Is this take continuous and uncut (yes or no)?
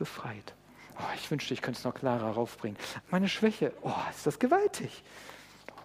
no